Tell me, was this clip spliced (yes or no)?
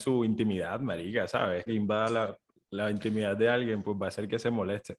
yes